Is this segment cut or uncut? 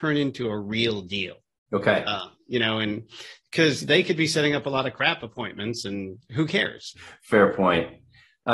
cut